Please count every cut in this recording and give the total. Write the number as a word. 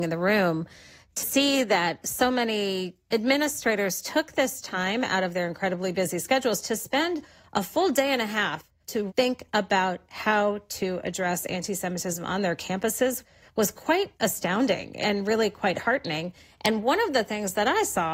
one